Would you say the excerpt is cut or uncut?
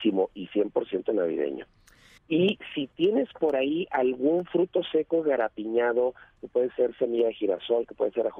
cut